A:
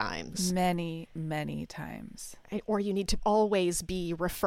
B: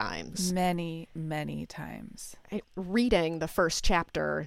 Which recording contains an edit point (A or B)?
B